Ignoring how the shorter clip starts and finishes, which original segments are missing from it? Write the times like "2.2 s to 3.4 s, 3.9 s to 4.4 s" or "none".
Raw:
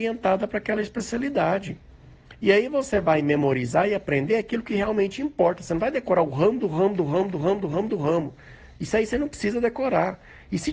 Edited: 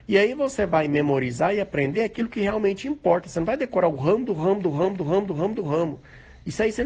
none